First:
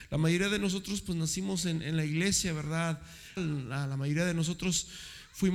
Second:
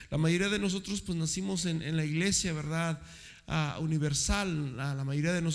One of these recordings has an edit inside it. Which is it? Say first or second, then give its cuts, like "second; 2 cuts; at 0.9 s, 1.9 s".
first; 1 cut; at 3.4 s